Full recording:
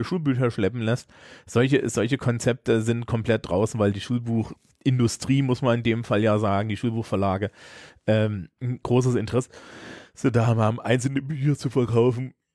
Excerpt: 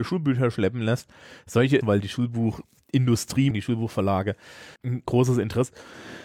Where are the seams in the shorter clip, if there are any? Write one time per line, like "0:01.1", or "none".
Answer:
0:01.8
0:03.5
0:04.8